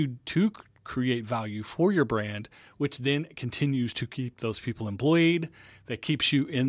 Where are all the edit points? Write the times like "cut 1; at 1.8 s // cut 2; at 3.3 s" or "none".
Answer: none